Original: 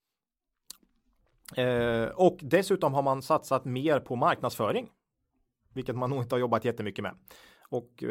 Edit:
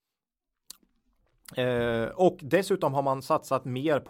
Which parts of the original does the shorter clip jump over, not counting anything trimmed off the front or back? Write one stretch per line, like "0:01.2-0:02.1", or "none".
none